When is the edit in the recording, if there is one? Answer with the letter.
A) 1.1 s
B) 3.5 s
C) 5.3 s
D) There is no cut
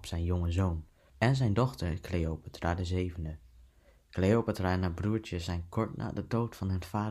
A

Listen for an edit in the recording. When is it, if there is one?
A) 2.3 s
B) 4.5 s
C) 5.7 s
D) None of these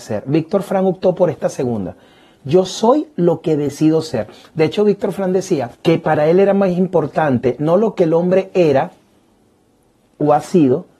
C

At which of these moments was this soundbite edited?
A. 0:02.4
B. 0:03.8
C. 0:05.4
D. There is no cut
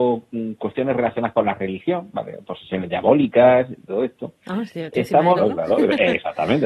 C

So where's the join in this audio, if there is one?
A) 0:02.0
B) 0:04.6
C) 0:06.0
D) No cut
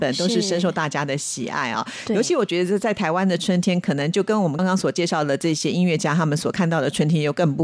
B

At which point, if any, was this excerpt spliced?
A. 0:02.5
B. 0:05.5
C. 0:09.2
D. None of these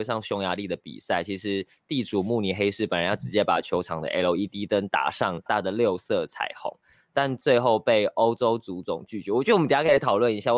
B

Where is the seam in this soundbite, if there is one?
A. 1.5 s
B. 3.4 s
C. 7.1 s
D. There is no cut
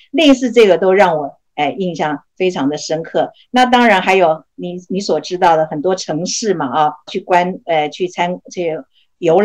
C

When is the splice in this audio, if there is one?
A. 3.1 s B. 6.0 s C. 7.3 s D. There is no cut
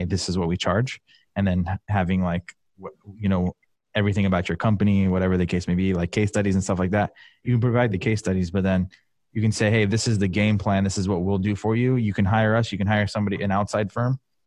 D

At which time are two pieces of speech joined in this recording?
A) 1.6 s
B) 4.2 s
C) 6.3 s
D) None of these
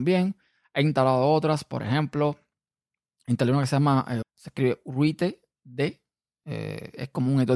B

